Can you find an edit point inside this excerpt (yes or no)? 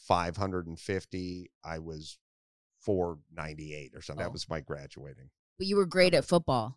yes